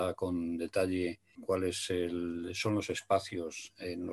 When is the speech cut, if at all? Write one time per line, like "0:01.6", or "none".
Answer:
0:01.3